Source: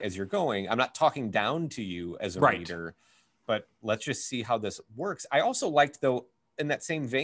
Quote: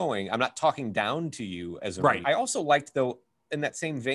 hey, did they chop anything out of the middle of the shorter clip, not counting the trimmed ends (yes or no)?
yes